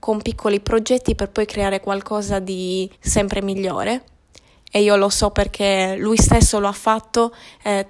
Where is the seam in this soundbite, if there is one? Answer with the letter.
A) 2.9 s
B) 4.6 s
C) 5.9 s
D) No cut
A